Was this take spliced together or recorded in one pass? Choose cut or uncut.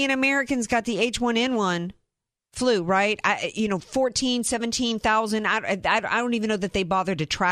uncut